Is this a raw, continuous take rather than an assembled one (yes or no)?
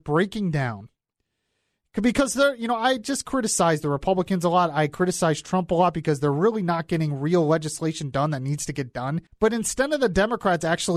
no